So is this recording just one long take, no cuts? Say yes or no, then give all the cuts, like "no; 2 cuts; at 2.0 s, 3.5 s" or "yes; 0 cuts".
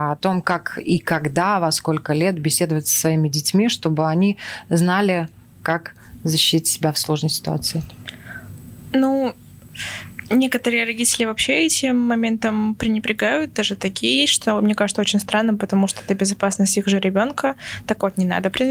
yes; 0 cuts